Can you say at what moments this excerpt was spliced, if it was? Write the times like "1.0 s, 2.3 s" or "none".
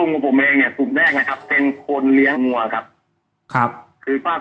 2.3 s